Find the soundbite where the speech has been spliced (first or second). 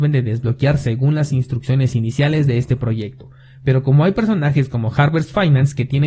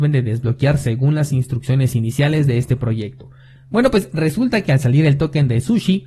second